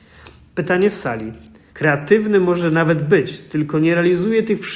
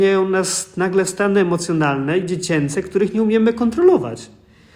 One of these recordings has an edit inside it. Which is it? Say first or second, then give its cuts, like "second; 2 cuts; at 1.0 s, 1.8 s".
first; 1 cut; at 1.7 s